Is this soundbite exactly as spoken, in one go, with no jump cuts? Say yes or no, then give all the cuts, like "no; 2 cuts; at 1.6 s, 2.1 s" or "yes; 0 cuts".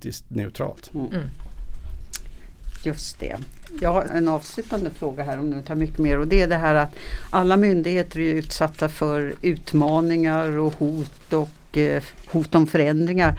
no; 1 cut; at 4.1 s